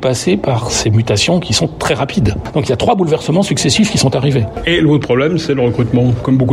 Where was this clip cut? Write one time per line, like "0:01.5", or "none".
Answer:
none